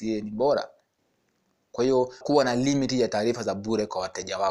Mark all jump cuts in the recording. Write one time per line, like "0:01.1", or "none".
0:02.2